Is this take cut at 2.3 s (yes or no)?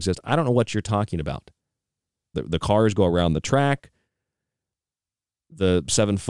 yes